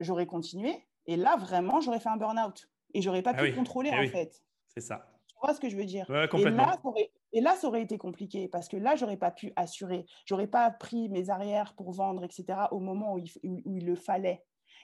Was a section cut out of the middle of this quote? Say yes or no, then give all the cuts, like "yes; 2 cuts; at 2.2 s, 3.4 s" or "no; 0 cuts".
yes; 1 cut; at 4.6 s